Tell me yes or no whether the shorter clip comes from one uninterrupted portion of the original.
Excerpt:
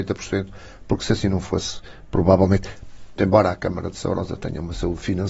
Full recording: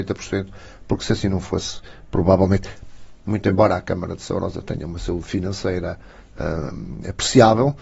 no